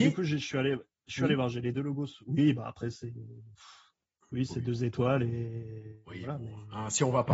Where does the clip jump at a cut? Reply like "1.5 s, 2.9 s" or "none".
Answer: none